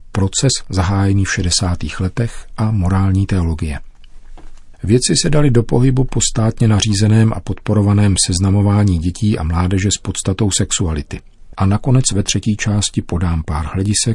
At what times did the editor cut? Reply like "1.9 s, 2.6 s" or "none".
11.5 s